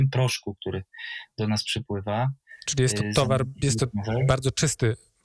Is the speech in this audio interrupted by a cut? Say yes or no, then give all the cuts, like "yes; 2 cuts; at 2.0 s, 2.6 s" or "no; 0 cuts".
no; 0 cuts